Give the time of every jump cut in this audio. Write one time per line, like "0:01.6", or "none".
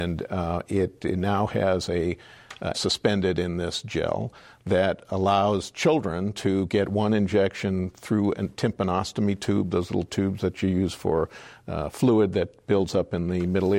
0:02.7